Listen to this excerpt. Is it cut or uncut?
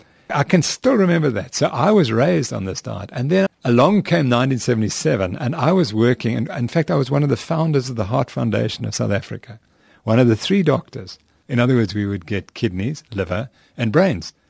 cut